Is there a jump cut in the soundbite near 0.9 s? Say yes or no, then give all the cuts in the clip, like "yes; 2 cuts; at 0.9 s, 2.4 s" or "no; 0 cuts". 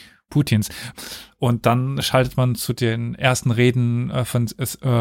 yes; 1 cut; at 0.9 s